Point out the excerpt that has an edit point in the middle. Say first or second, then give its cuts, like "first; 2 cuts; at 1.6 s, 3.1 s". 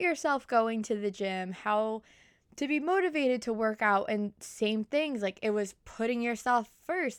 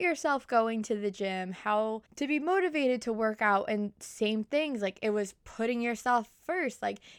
second; 1 cut; at 2.1 s